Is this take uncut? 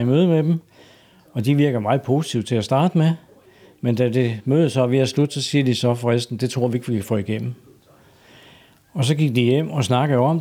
yes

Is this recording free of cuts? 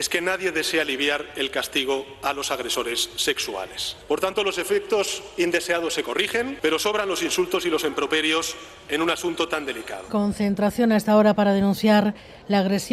no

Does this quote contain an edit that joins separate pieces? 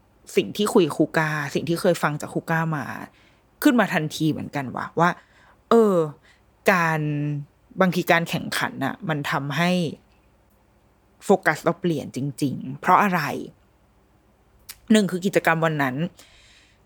no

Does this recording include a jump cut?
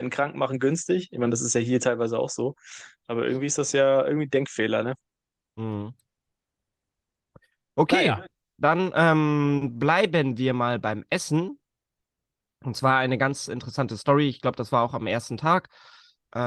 no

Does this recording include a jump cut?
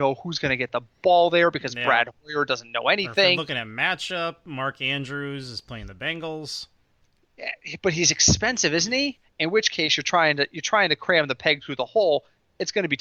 yes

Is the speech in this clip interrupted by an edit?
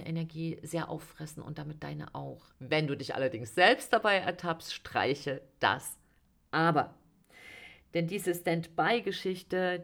yes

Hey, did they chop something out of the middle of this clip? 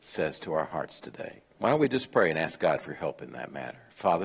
yes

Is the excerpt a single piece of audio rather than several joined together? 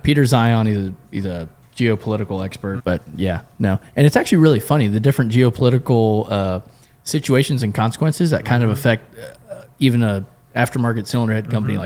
no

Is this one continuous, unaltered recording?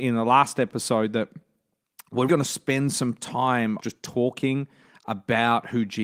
no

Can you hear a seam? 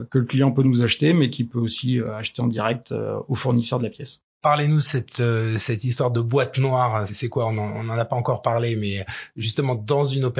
no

